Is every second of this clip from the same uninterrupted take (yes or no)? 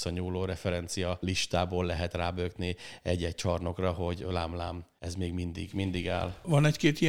yes